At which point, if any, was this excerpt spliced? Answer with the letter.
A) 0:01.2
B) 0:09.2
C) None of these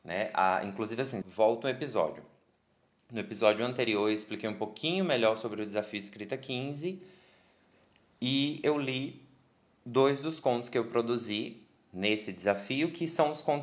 A